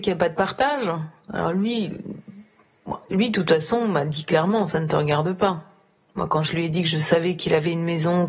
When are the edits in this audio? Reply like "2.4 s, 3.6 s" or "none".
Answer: none